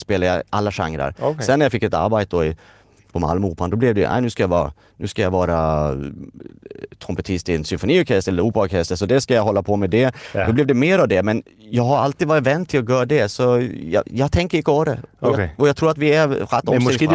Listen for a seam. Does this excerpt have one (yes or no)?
no